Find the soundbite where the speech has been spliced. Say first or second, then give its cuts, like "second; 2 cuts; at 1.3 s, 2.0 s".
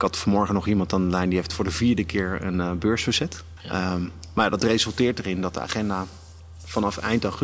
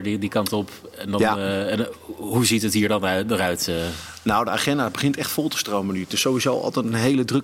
first; 1 cut; at 3.6 s